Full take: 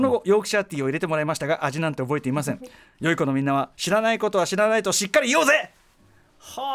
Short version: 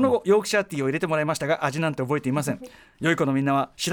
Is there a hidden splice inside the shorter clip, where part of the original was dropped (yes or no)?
no